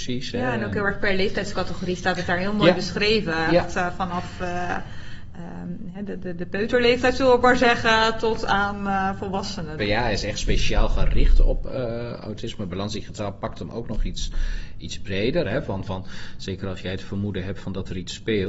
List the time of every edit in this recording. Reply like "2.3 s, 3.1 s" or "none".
9.8 s, 15.4 s